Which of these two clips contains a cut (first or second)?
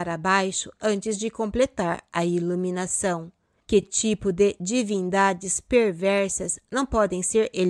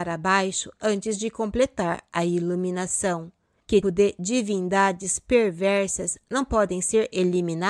second